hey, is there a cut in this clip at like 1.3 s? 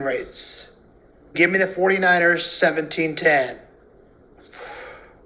yes; 1 cut; at 1.3 s

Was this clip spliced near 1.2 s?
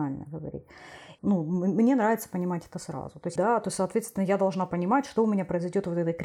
yes; 2 cuts; at 1.2 s, 3.4 s

